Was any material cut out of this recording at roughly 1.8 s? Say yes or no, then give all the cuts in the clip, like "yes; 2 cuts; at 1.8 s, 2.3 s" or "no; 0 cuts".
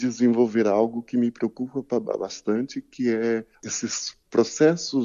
no; 1 cut; at 3.5 s